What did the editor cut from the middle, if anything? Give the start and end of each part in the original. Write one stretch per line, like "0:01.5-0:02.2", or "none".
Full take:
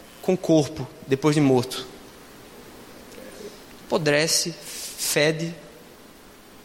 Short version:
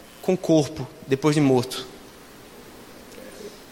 none